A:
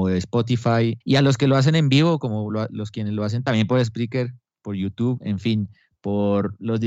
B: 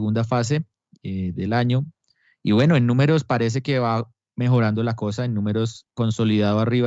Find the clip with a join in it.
A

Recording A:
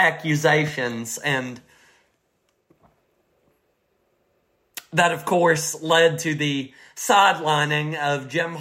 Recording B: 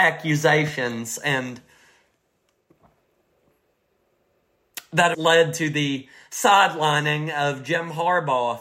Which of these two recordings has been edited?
B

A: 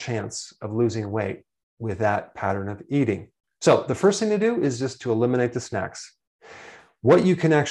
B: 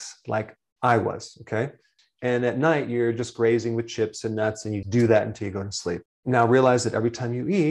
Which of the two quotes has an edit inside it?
B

